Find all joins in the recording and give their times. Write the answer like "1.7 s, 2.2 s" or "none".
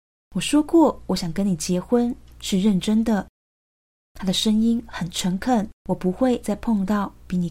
5.8 s